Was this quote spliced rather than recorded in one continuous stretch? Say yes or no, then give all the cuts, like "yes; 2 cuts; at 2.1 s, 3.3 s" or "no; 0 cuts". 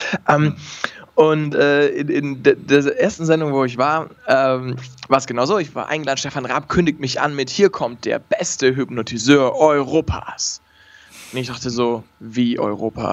no; 0 cuts